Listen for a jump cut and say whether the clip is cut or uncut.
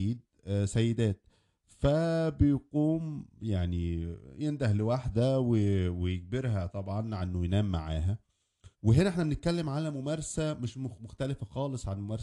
cut